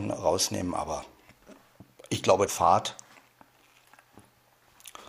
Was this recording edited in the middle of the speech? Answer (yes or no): yes